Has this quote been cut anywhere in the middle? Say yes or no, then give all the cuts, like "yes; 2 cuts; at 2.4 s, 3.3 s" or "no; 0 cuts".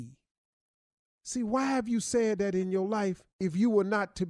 yes; 1 cut; at 3.3 s